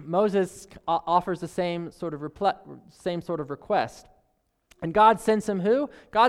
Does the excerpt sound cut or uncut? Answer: uncut